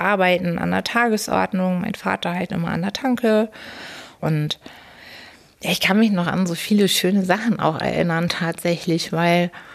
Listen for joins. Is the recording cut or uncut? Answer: cut